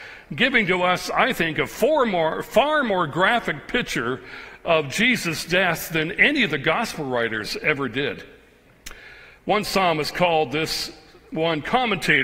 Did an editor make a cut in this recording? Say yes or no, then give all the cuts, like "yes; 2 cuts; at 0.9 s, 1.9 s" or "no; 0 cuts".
no; 0 cuts